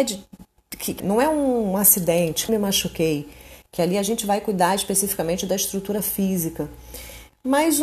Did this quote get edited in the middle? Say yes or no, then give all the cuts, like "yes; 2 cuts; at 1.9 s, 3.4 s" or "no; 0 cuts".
yes; 2 cuts; at 1.0 s, 2.5 s